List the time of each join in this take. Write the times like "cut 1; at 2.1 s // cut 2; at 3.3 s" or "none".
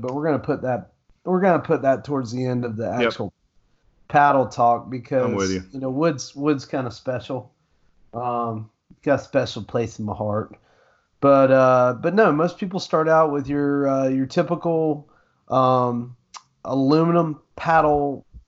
cut 1; at 16.6 s